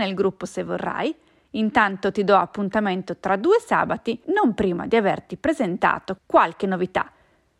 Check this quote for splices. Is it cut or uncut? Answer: cut